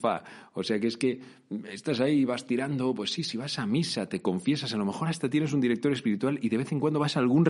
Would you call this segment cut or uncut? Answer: uncut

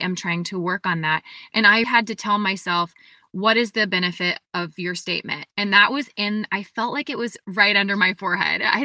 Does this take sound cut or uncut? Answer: cut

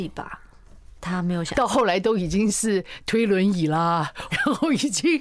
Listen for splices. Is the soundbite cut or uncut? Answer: cut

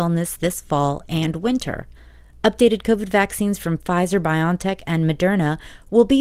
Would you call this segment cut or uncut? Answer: uncut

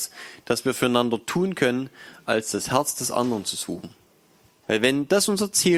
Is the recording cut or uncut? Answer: cut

